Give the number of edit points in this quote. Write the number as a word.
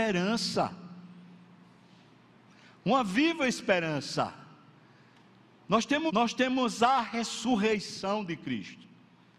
one